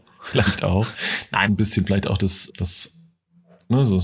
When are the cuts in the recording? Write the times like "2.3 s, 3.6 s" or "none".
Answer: 1.5 s, 2.5 s